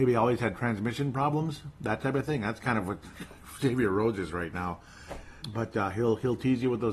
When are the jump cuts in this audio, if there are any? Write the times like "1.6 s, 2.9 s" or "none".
5.4 s